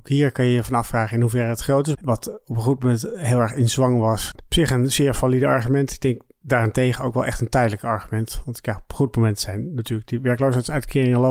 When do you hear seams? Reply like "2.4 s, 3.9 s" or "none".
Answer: 2.0 s, 4.4 s

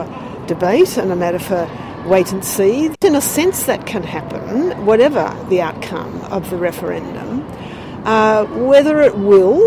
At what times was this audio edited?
2.9 s

